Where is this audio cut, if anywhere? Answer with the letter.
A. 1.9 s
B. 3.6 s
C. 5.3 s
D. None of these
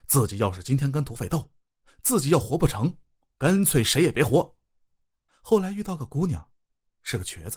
C